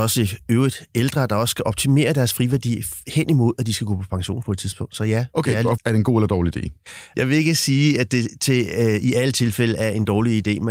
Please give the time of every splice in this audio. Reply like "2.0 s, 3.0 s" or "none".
5.8 s, 7.1 s